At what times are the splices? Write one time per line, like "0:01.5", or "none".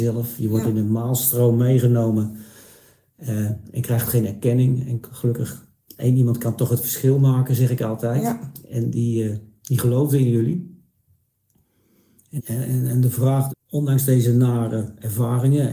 0:12.4
0:13.5